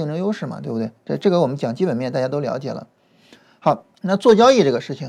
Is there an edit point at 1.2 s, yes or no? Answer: no